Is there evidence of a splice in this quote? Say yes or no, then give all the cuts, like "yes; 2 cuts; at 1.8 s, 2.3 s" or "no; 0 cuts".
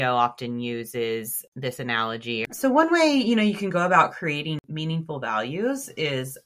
yes; 1 cut; at 2.5 s